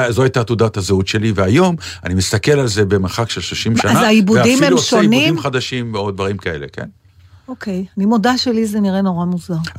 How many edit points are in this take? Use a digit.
0